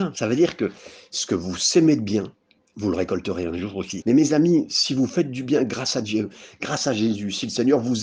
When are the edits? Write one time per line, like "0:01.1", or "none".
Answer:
0:04.0

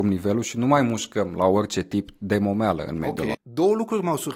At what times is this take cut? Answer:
0:03.3

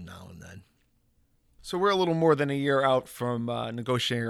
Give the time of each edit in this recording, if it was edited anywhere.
none

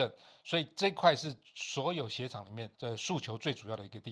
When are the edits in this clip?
0:02.7

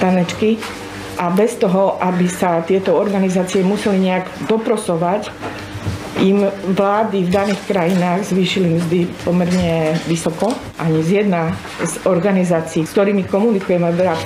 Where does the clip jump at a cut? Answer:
0:10.7

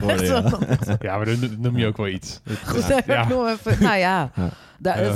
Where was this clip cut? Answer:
0:02.6

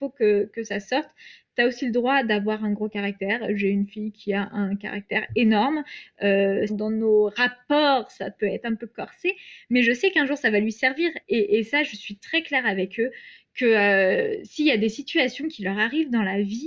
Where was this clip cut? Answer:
0:06.7
0:11.2

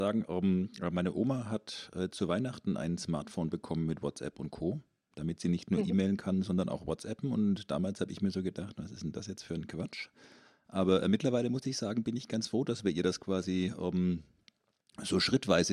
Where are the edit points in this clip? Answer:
none

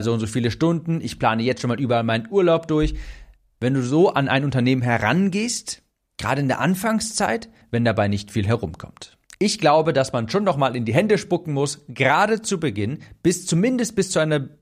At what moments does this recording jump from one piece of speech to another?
0:07.6
0:09.3

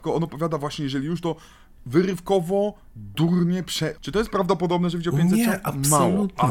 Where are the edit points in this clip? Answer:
0:04.0

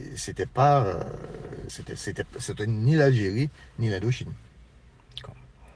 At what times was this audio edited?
0:01.7

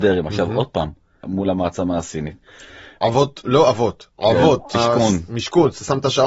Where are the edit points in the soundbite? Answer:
0:01.2
0:03.0
0:04.7

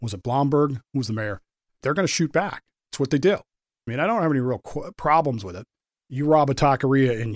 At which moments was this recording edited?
0:01.8
0:03.9
0:06.0

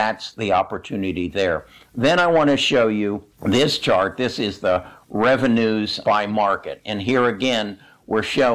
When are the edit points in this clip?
0:03.3
0:06.0

